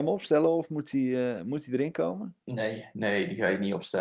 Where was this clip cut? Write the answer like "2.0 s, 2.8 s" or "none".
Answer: 2.4 s